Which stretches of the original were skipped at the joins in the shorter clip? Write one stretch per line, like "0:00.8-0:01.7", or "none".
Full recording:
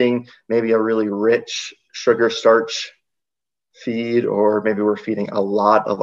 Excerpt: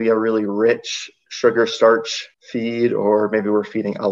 0:03.0-0:03.7